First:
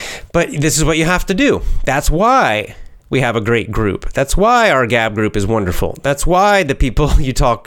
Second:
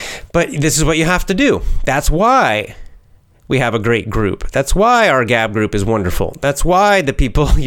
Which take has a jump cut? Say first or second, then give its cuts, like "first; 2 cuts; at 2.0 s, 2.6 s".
first; 1 cut; at 3.0 s